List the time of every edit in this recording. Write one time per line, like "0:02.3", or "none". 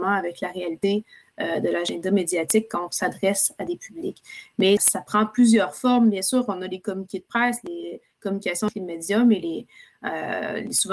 0:04.8